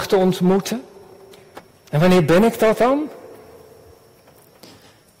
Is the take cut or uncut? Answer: uncut